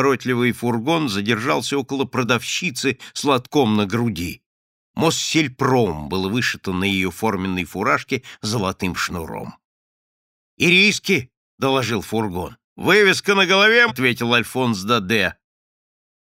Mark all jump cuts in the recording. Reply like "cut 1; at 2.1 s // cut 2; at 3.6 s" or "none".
cut 1; at 12.7 s // cut 2; at 13.9 s